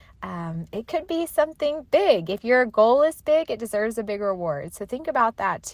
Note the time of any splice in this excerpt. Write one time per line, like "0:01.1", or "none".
none